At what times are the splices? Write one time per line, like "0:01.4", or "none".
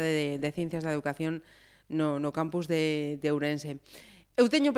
none